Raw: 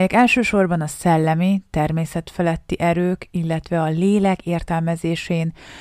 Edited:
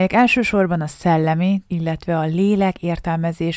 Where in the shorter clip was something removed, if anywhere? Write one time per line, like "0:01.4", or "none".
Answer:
0:01.7